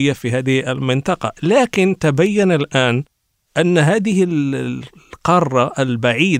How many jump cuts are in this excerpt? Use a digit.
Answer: 0